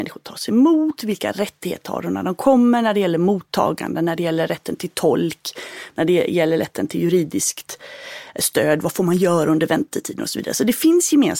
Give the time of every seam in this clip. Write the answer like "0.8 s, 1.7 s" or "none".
none